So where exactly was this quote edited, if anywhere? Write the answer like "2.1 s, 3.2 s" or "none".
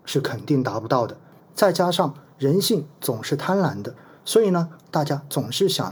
1.4 s, 4.8 s

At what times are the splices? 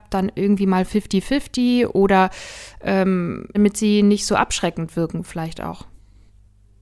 3.5 s

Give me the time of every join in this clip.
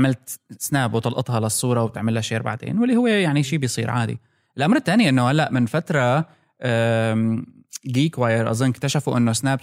none

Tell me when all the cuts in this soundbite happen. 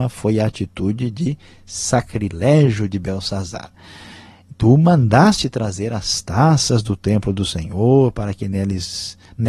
none

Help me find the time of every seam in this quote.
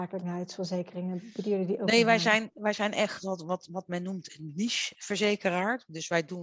none

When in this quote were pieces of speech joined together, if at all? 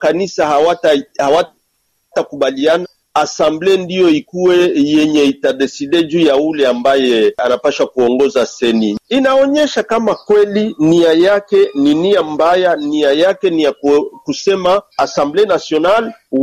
2.8 s, 14.9 s

